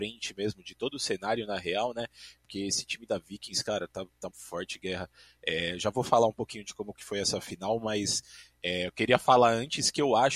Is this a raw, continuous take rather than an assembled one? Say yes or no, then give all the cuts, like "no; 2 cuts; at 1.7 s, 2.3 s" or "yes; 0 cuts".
no; 1 cut; at 4.3 s